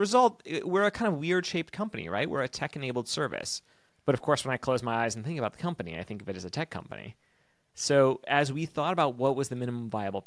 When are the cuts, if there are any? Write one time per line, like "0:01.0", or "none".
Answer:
0:03.9